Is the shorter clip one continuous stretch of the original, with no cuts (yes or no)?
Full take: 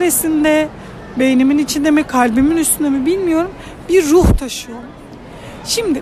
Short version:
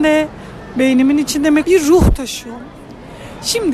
no